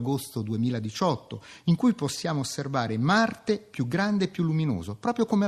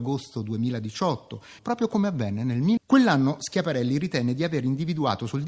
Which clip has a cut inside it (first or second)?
second